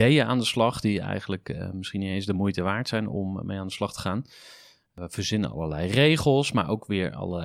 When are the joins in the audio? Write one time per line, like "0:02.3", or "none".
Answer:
none